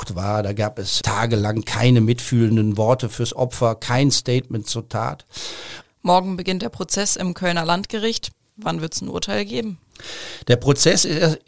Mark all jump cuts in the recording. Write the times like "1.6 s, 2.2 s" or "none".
1.0 s, 5.8 s